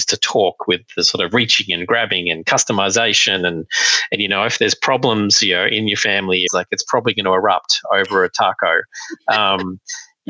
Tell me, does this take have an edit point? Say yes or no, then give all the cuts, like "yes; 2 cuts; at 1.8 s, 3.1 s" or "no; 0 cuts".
yes; 1 cut; at 6.5 s